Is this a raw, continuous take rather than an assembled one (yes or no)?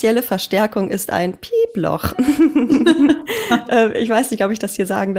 yes